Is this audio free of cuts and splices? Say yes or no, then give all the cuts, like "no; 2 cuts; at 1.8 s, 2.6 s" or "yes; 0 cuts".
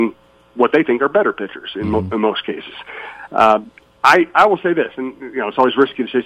yes; 0 cuts